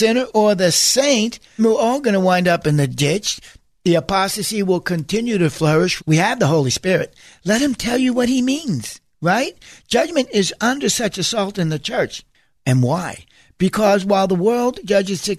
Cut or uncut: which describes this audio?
cut